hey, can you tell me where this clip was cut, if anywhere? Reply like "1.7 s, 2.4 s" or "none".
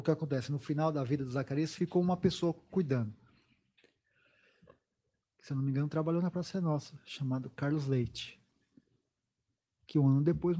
5.2 s